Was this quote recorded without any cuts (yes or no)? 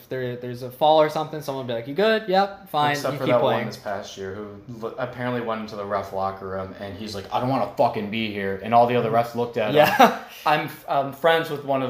yes